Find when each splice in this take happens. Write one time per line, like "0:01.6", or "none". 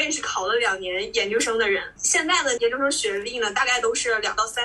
0:02.6